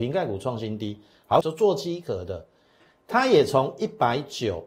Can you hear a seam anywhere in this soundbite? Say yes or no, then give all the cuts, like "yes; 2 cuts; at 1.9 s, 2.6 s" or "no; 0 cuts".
yes; 1 cut; at 1.4 s